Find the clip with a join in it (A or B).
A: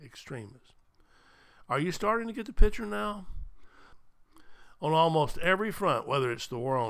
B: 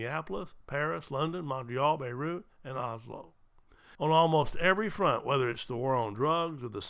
B